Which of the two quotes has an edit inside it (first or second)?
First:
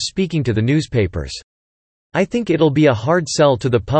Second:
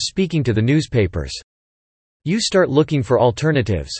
second